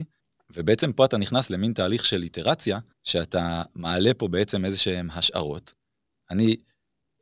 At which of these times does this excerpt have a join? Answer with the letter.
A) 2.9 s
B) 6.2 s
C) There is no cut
A